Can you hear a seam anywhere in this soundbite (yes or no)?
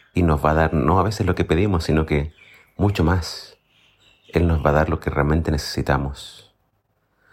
no